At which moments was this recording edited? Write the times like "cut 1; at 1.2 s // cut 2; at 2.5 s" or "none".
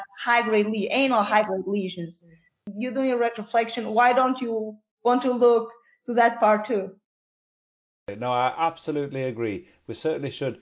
none